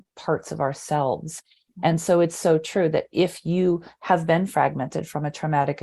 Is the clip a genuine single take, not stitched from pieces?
yes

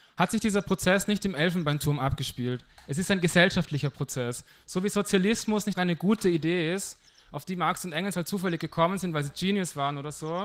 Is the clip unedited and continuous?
no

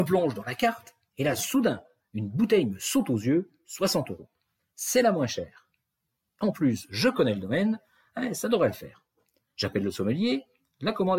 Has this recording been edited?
no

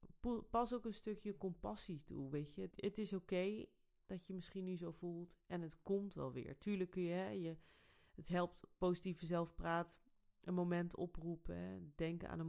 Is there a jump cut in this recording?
yes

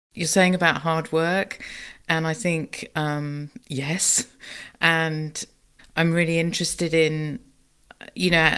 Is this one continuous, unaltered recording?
no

